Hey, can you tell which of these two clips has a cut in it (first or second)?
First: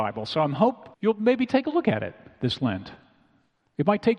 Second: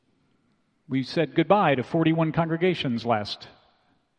first